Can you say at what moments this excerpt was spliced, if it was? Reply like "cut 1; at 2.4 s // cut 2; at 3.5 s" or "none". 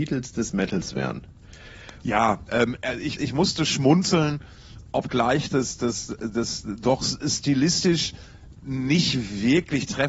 cut 1; at 2.0 s // cut 2; at 3.2 s